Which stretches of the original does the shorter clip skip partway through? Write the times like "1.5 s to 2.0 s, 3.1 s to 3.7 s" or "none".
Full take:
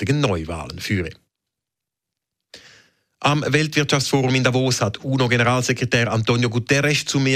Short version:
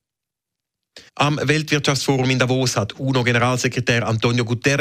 2.6 s to 3.1 s